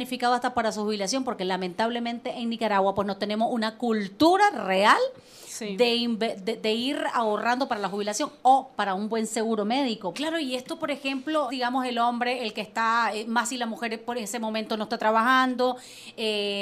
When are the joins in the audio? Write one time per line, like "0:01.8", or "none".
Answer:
0:10.1
0:11.5

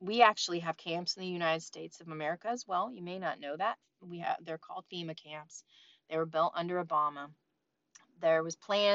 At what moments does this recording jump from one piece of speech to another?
none

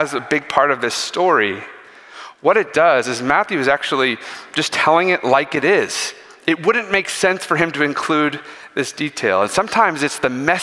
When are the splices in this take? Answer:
none

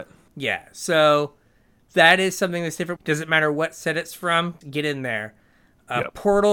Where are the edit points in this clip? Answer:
0:03.0
0:04.6

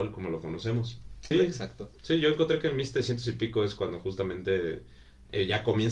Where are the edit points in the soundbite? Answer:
0:01.3

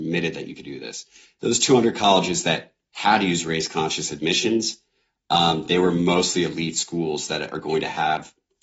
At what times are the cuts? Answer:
none

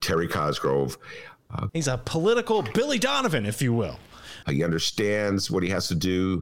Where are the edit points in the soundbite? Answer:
0:01.7
0:04.4

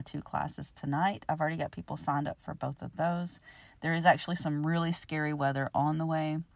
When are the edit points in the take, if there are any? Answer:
none

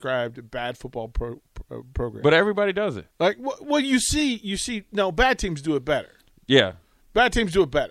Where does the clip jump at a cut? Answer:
0:03.1

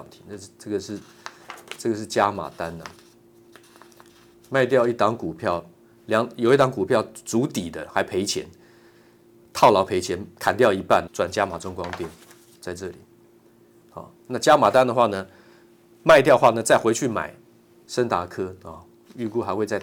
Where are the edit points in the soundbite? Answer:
0:11.1
0:17.8

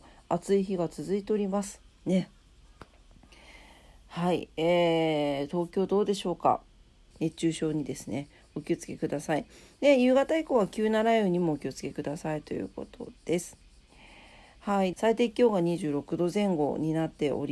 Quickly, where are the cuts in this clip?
0:07.1
0:14.9

